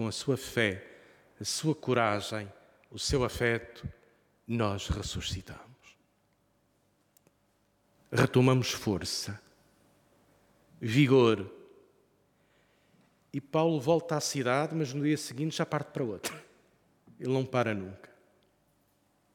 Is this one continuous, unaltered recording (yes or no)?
yes